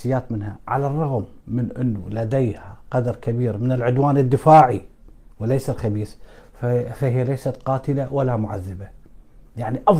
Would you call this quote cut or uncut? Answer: cut